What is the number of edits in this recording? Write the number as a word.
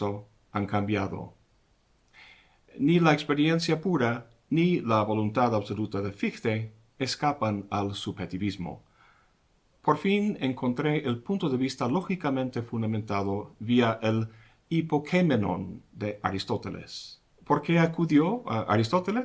one